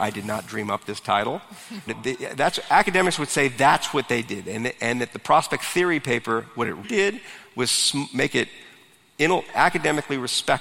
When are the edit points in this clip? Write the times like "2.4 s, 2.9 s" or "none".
1.9 s, 6.8 s